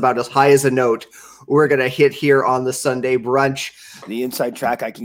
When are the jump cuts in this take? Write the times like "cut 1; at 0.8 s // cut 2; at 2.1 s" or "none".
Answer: cut 1; at 4.0 s